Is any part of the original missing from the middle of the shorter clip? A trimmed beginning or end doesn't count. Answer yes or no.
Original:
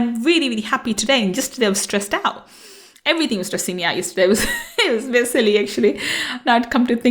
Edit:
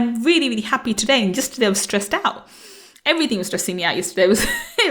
no